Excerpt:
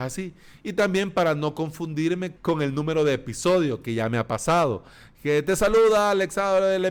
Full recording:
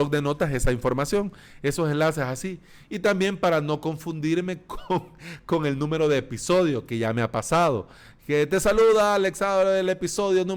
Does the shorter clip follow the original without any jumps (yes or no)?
no